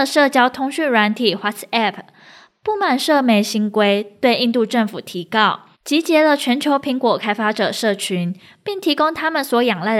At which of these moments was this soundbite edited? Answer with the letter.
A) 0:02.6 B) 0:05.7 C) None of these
B